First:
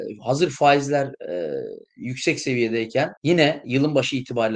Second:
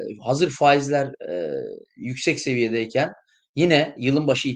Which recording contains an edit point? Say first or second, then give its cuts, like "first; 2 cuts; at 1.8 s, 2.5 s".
first; 1 cut; at 3.2 s